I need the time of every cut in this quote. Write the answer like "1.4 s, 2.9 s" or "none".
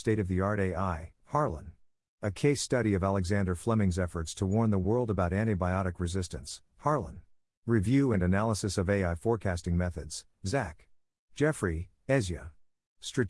1.2 s, 7.5 s, 11.2 s